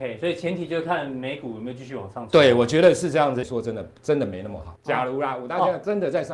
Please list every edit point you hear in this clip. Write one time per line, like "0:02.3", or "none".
0:03.4
0:04.8